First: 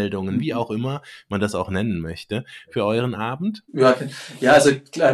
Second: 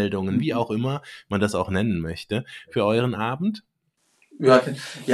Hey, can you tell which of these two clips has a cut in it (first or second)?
first